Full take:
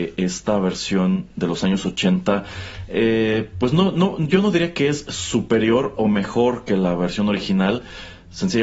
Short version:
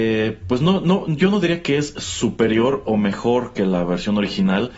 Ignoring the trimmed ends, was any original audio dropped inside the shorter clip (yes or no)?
no